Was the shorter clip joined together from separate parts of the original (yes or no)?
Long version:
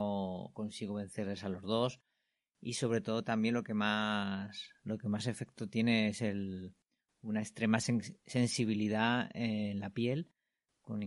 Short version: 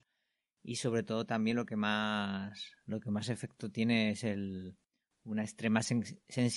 no